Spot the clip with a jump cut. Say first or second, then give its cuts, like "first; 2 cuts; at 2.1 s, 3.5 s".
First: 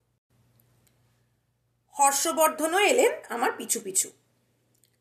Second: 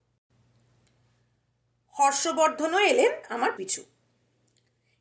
second; 1 cut; at 3.6 s